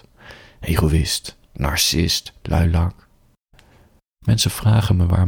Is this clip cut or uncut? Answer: uncut